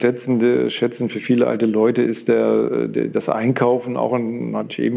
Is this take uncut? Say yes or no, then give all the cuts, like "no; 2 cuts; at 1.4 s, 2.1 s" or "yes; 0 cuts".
yes; 0 cuts